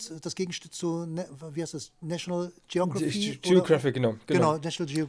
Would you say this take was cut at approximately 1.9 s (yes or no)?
no